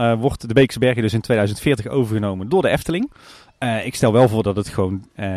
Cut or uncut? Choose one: uncut